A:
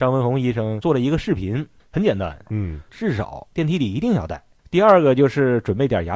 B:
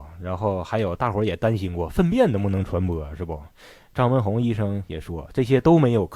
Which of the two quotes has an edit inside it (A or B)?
A